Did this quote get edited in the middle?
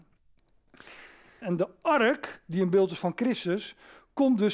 yes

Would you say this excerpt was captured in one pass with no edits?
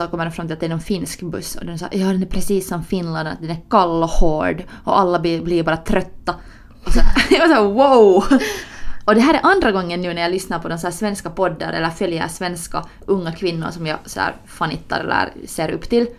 yes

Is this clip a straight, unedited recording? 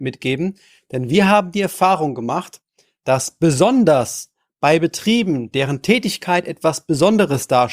yes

